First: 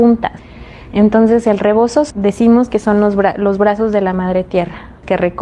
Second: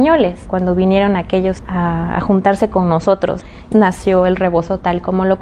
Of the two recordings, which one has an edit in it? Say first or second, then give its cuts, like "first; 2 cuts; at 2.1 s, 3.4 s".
second; 1 cut; at 3.7 s